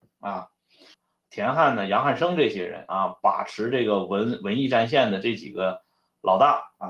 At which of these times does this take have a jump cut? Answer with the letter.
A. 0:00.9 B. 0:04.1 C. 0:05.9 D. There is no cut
A